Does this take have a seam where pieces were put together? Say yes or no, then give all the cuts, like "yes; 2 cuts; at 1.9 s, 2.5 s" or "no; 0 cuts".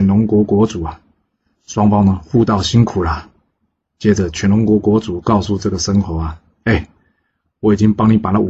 no; 0 cuts